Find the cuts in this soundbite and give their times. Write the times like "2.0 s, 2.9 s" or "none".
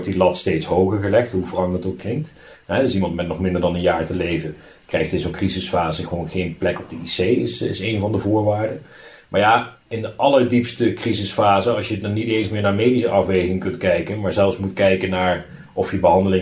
none